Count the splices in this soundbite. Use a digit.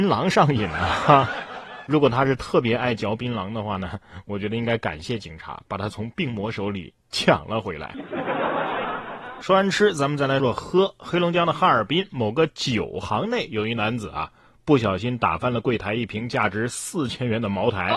1